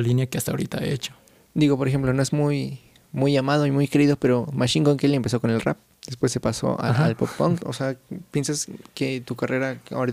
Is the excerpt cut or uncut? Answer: cut